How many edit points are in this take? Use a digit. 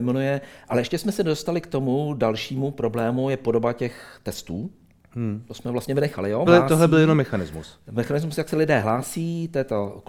1